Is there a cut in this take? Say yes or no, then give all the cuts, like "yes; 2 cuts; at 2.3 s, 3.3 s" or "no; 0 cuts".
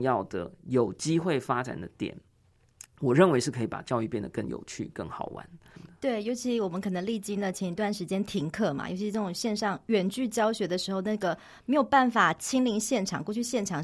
no; 0 cuts